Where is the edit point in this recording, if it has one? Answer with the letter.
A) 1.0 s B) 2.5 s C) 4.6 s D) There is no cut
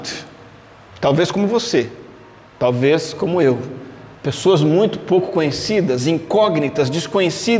D